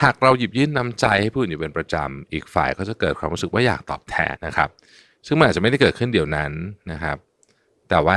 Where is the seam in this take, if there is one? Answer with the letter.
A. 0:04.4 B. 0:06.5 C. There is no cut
A